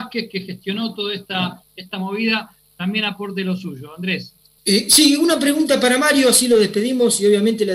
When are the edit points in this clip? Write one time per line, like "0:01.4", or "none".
none

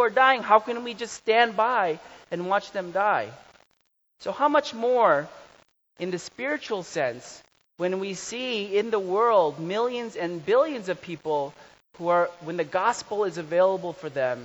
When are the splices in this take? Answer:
none

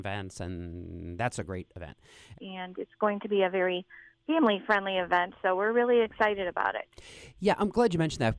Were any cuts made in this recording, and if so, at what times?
0:02.3

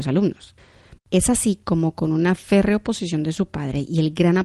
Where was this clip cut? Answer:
0:01.0

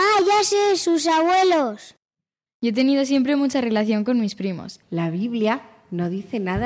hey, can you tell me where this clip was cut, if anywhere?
0:02.5
0:04.8

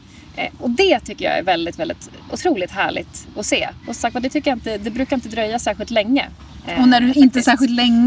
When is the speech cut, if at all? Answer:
0:03.8

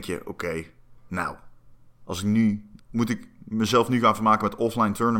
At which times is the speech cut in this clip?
0:01.0
0:02.8

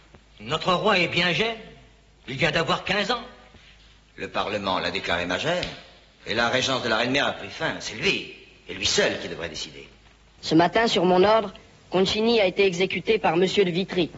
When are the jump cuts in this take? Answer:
none

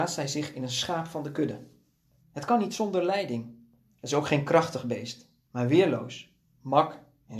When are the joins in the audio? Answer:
0:02.2

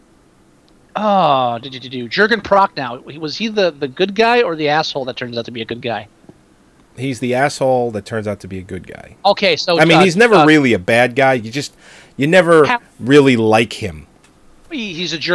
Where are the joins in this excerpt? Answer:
none

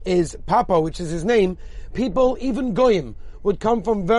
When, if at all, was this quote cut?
0:01.9

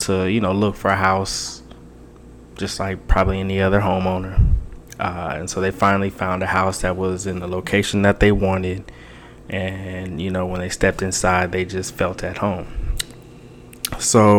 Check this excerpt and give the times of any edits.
none

